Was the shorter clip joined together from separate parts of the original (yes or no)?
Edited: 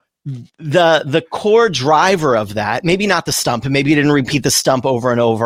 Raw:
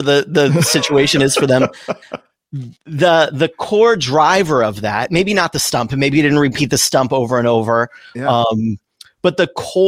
no